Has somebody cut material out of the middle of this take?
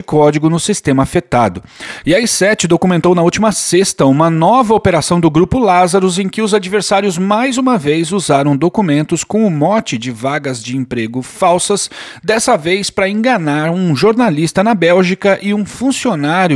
yes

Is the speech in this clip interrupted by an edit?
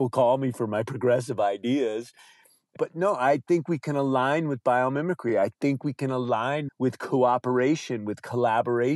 no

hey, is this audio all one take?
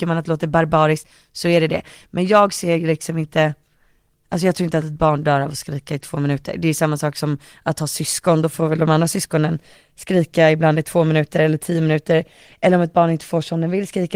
yes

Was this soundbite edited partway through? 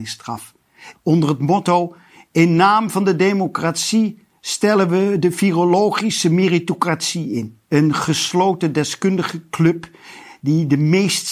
yes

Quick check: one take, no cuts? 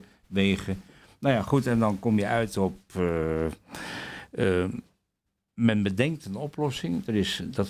yes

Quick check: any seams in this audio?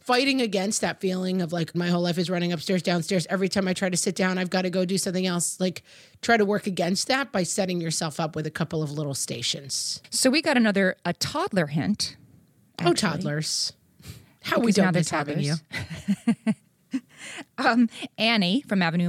yes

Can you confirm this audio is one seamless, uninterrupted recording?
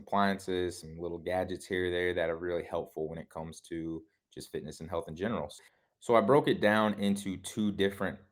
yes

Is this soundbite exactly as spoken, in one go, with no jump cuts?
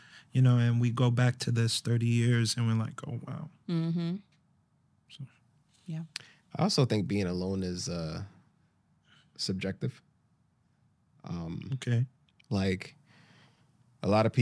yes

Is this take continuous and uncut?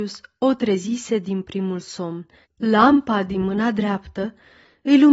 no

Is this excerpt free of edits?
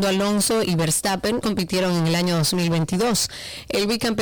no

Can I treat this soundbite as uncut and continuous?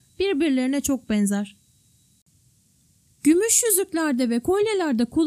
yes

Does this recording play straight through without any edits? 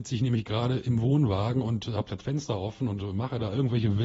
yes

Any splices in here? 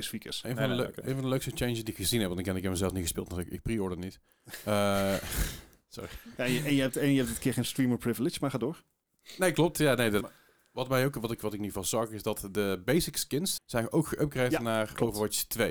yes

